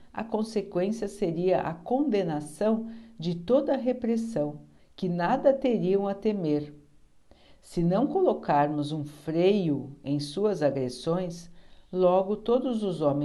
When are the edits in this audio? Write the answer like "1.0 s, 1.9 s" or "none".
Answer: 4.8 s